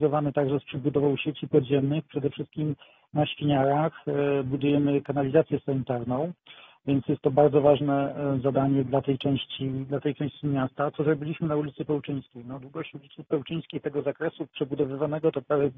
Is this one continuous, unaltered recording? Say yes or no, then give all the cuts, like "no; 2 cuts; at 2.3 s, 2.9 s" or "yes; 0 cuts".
no; 1 cut; at 8.9 s